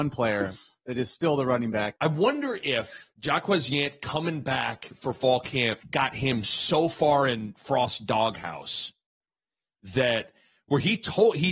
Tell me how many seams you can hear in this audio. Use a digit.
3